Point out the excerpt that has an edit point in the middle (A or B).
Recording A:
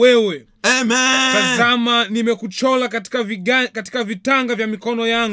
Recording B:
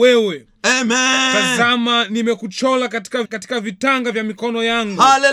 B